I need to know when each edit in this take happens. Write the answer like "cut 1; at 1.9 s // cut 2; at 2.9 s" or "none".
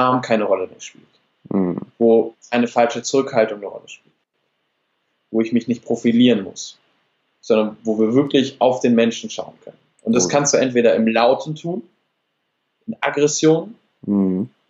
none